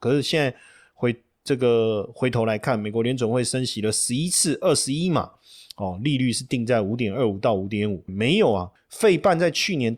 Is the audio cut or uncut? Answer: cut